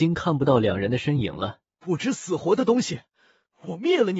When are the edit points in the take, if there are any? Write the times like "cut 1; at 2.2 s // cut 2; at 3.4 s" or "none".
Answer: cut 1; at 1.7 s